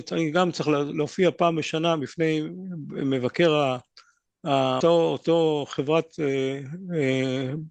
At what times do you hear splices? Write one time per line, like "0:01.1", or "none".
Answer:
0:04.8